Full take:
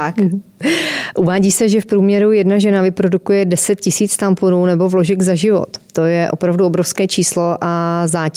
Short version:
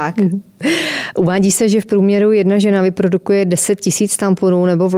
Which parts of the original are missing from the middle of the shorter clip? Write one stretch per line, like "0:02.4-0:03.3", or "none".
none